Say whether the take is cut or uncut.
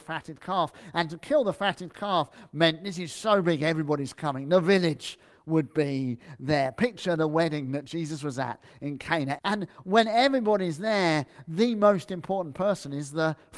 cut